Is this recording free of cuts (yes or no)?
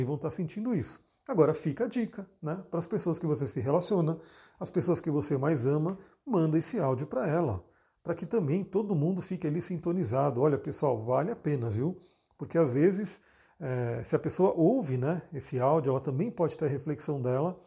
yes